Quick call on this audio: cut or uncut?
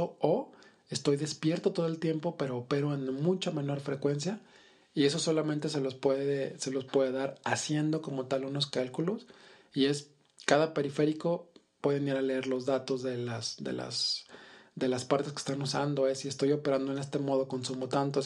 uncut